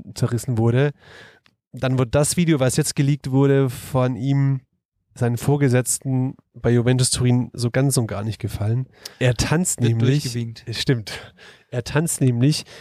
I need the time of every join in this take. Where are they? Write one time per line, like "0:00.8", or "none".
0:09.1